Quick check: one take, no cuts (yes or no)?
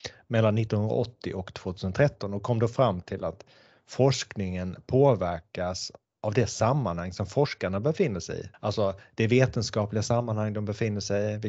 no